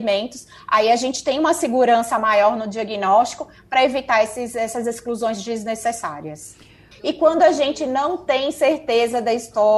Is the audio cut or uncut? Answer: cut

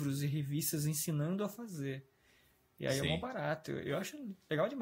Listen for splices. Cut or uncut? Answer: uncut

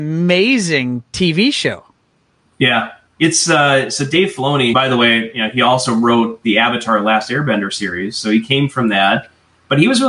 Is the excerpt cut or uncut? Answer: cut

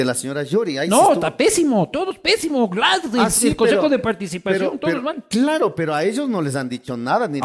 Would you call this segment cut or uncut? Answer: uncut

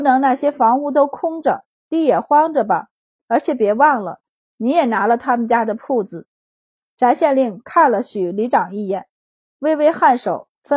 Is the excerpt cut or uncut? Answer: cut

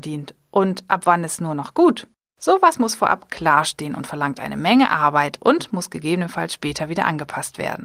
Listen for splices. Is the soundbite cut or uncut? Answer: uncut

